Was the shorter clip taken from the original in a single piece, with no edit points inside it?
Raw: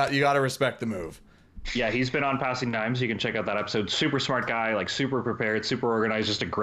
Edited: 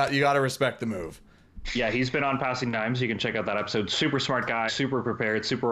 no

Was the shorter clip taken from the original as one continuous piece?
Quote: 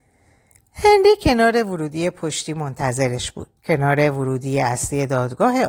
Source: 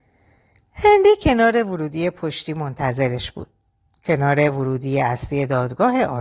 no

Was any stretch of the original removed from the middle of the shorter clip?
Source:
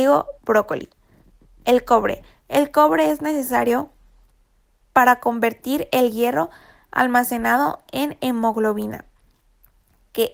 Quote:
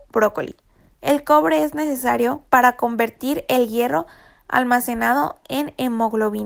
yes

